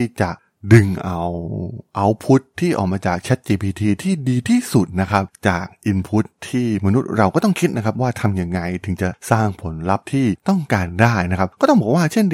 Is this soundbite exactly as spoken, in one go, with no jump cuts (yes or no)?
yes